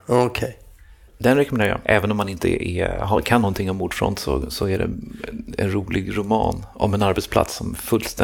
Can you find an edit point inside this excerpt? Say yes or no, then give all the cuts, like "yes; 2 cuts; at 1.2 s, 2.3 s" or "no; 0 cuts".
yes; 1 cut; at 1.1 s